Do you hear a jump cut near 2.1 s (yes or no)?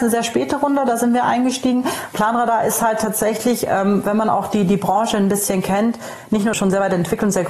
no